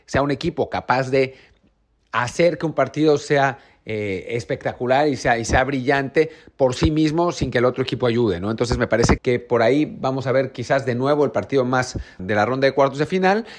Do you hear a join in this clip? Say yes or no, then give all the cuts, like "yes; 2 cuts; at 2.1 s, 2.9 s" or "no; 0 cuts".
yes; 2 cuts; at 9.2 s, 12.2 s